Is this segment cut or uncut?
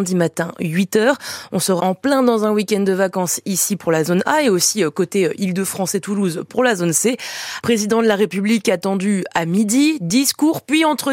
cut